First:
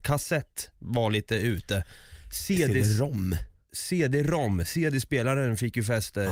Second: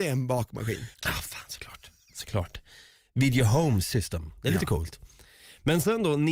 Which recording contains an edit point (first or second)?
second